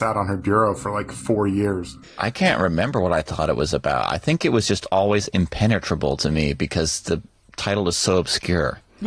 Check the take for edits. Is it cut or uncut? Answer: uncut